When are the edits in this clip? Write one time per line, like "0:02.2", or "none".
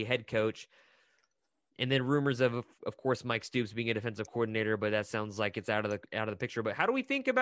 none